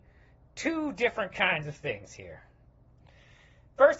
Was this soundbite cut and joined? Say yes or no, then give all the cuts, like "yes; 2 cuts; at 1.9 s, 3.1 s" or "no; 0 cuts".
no; 0 cuts